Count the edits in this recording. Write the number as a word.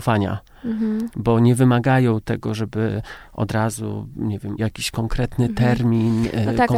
one